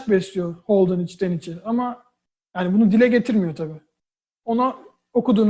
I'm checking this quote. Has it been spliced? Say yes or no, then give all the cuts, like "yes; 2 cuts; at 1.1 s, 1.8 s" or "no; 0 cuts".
no; 0 cuts